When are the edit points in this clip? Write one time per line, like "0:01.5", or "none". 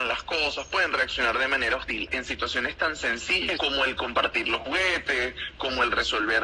0:02.1
0:03.6